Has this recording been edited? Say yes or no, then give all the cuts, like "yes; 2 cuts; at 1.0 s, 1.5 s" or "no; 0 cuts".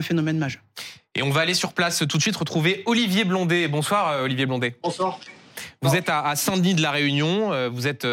no; 0 cuts